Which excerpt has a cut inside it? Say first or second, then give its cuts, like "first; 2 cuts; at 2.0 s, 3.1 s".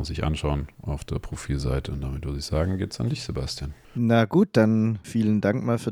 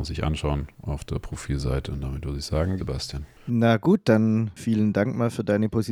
second; 1 cut; at 2.8 s